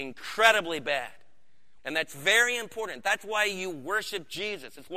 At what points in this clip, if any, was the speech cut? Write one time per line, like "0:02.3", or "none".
0:01.8